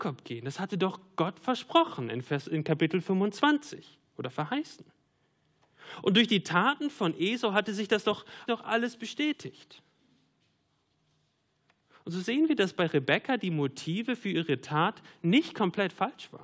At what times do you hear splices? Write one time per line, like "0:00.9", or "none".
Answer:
0:08.5